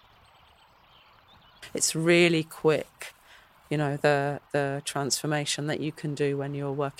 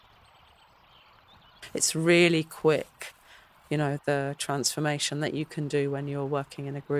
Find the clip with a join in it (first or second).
second